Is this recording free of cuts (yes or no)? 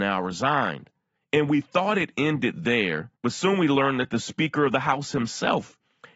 no